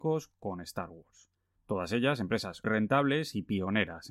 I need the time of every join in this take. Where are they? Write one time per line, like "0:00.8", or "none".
0:01.6
0:02.6

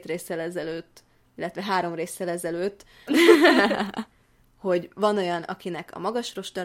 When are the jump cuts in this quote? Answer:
0:03.1

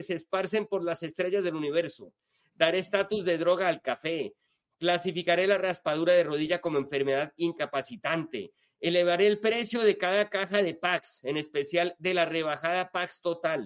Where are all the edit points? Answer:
none

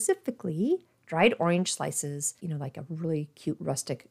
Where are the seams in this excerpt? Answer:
0:02.4

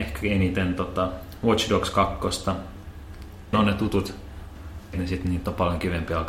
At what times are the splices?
0:03.5
0:04.9

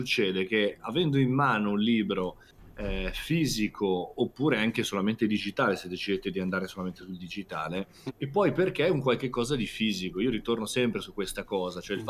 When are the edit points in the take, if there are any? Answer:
0:08.1

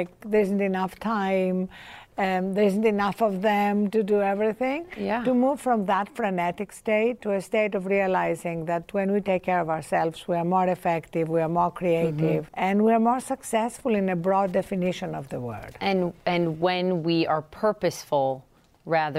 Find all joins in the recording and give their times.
0:12.5

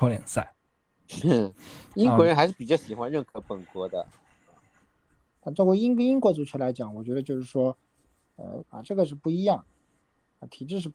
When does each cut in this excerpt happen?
0:05.3
0:08.6

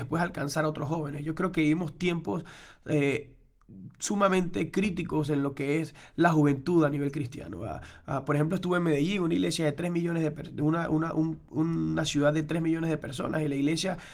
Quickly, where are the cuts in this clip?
none

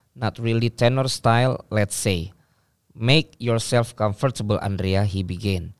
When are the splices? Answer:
none

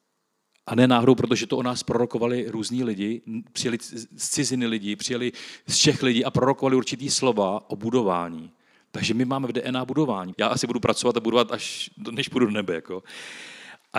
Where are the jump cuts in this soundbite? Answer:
0:10.3

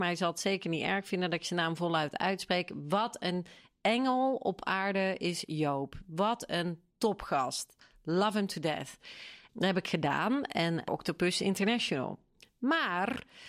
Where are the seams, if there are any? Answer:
0:09.5
0:10.9

